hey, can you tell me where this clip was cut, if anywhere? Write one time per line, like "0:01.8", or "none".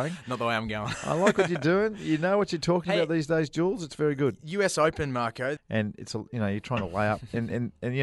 0:05.6